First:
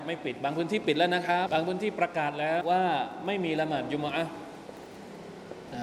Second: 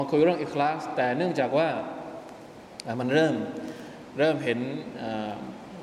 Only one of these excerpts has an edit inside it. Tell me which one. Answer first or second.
first